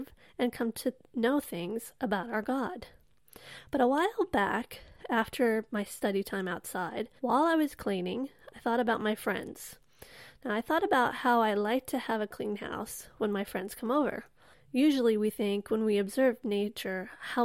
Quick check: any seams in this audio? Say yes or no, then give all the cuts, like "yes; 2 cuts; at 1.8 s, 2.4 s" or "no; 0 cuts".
yes; 2 cuts; at 7.2 s, 14.5 s